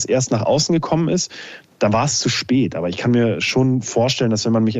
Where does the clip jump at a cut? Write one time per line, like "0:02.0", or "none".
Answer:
none